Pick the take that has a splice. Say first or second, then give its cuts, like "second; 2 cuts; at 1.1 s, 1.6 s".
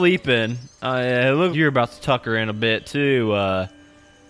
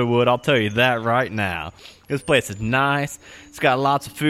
first; 1 cut; at 1.5 s